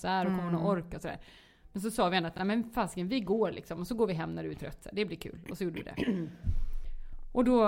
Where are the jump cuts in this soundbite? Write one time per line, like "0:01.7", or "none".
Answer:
none

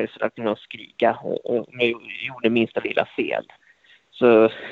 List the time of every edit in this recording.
none

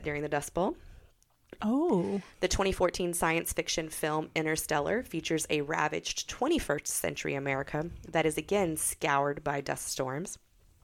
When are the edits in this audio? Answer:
0:01.6

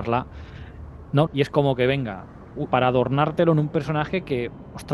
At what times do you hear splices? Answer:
0:01.3
0:02.7

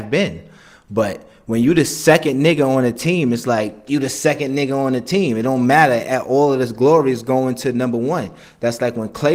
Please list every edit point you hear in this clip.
none

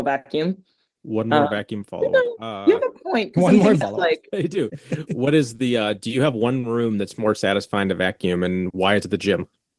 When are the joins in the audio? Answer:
0:03.8

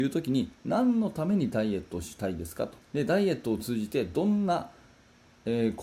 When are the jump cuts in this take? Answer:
0:02.8

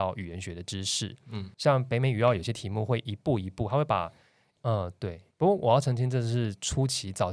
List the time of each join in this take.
0:04.6

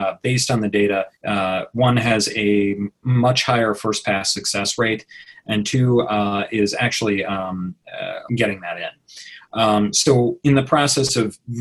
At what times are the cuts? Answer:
0:01.2
0:08.3

